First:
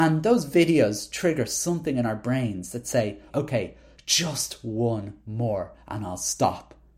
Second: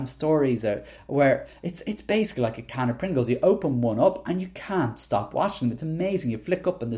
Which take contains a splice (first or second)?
first